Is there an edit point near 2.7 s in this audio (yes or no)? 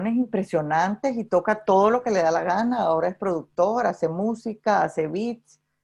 no